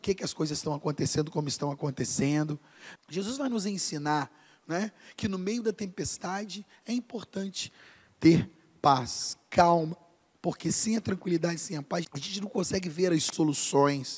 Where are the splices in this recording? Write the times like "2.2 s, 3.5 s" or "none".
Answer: 3.0 s, 10.3 s, 12.0 s